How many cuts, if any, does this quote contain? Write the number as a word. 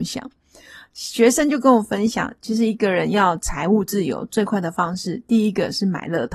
zero